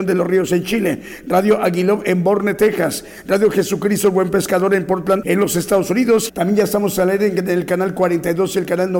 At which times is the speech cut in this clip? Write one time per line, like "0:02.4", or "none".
0:05.2
0:06.3